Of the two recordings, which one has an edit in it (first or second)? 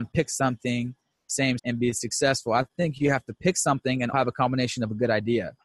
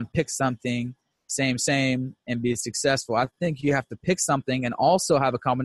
first